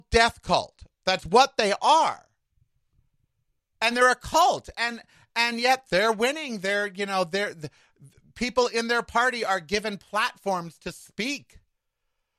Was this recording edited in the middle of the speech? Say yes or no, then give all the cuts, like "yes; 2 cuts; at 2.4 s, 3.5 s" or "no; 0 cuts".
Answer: yes; 1 cut; at 5.8 s